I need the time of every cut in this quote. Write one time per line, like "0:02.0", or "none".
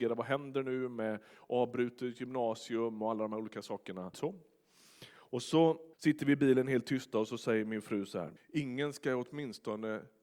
0:04.1
0:05.9
0:08.4